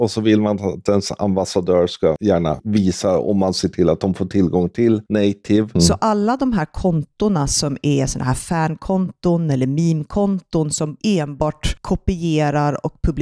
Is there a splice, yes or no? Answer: yes